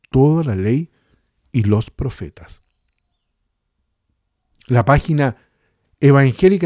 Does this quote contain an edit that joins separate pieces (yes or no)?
no